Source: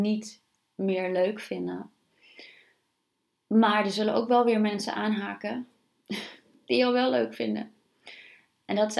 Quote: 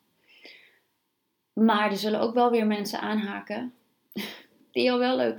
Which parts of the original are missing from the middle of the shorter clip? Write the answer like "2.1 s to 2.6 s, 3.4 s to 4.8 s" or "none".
none